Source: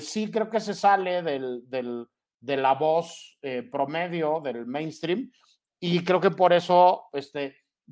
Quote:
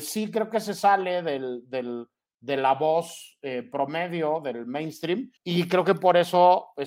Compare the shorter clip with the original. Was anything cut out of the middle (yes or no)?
yes